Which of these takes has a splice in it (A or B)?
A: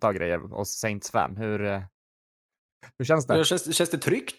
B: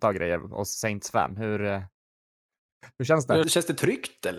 B